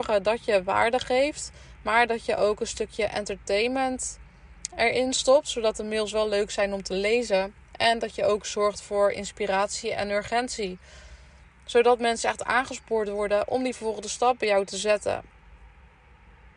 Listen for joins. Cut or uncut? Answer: uncut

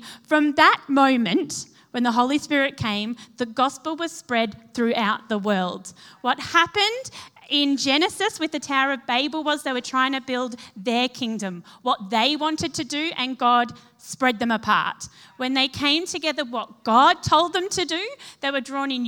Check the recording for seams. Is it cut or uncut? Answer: uncut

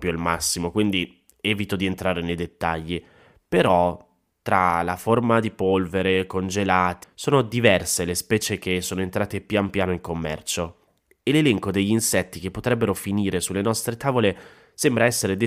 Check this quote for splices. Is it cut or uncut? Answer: cut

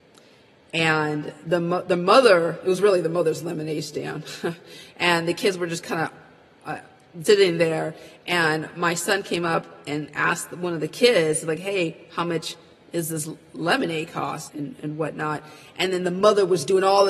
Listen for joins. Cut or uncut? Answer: cut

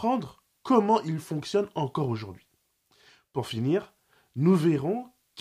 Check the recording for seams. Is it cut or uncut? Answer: uncut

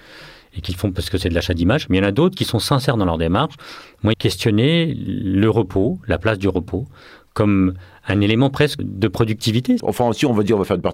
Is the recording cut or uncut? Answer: cut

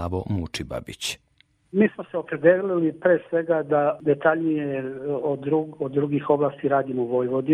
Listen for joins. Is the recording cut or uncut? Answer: uncut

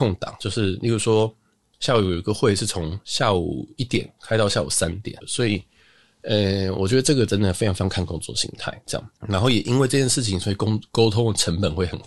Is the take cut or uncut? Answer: cut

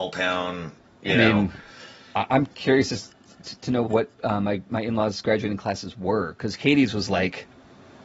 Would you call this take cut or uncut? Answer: cut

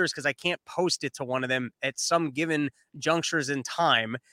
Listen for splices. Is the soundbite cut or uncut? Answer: uncut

